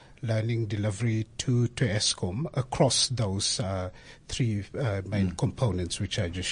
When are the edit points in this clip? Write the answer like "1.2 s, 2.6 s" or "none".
none